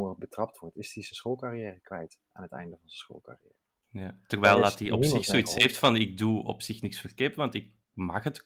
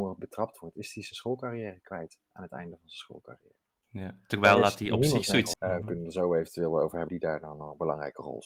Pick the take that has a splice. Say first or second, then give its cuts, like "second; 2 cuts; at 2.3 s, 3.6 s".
second; 2 cuts; at 5.5 s, 7.1 s